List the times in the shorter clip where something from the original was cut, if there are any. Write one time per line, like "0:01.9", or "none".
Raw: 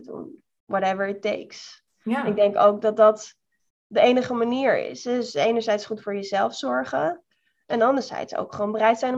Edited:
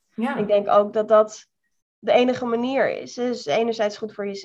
none